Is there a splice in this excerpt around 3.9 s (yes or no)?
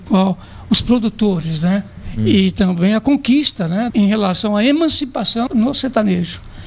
yes